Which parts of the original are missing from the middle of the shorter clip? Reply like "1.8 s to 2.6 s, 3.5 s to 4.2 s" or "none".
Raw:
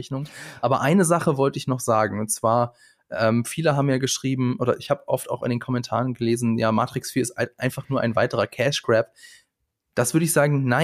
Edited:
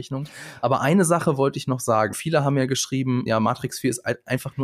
2.1 s to 3.4 s, 4.6 s to 6.6 s